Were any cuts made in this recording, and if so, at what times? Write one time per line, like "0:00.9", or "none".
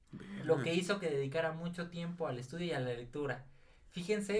none